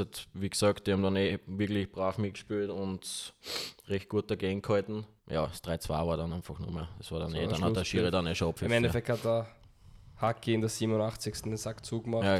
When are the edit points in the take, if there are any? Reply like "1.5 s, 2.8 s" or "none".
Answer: 5.2 s

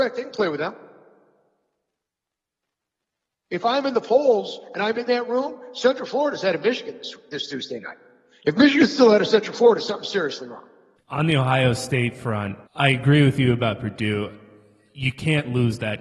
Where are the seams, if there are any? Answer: 11.0 s, 12.7 s

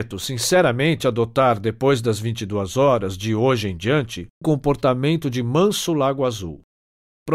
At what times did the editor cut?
4.4 s

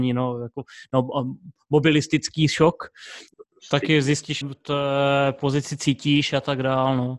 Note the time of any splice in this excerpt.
3.3 s, 4.4 s

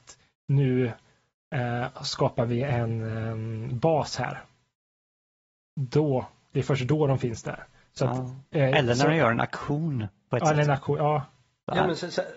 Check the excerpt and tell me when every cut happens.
none

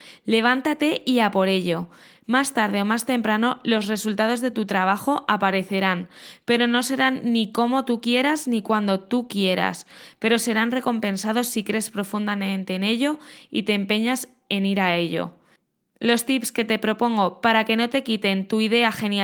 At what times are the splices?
none

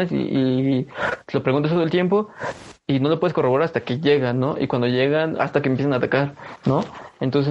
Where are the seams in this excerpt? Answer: 5.4 s

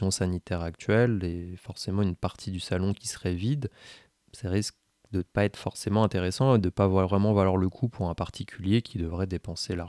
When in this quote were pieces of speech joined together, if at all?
none

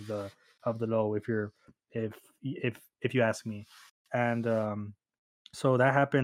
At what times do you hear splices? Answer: none

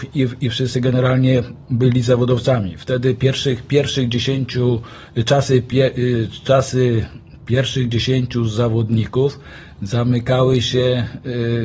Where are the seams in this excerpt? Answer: none

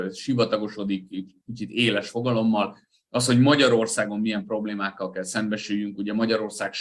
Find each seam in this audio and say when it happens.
none

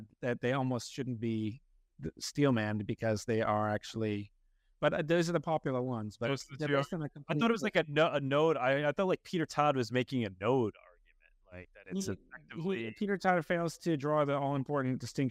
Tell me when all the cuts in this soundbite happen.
none

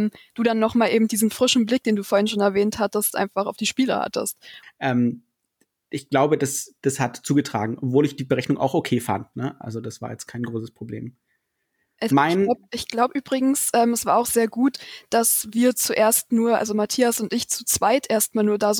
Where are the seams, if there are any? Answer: 4.6 s

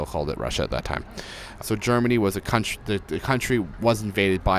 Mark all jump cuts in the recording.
1.6 s

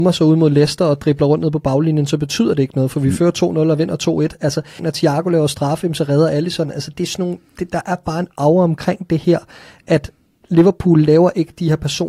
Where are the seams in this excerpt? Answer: 4.8 s

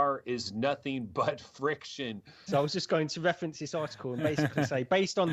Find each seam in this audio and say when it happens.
2.5 s

